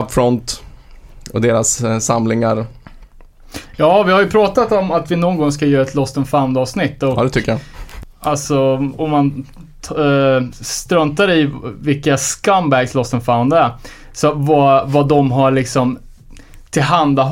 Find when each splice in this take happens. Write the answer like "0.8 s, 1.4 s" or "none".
none